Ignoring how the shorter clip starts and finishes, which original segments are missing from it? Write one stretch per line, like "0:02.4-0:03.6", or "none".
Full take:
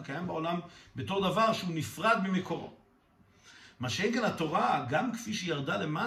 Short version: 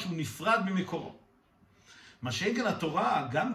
none